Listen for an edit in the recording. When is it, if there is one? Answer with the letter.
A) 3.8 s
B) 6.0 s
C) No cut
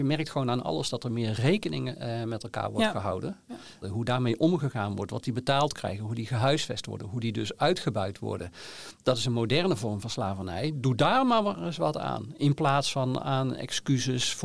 A